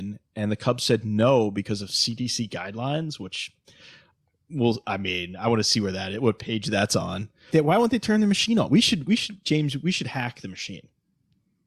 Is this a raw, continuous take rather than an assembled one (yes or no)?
no